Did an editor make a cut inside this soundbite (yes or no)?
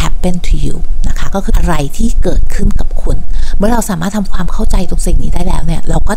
yes